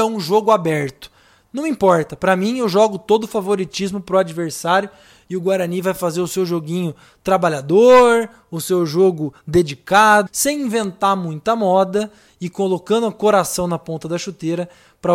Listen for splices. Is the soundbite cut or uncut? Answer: cut